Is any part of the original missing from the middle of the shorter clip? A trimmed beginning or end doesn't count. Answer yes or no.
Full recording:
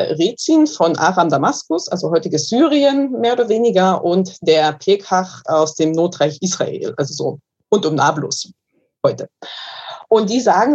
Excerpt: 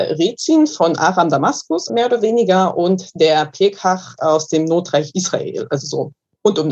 yes